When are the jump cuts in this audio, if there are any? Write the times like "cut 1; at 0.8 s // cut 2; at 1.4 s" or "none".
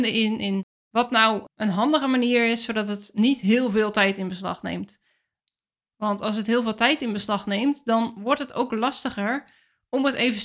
none